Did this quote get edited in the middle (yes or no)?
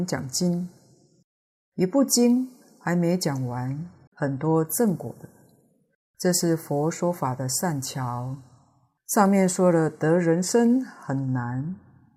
yes